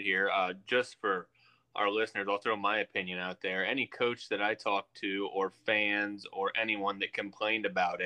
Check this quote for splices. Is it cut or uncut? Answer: uncut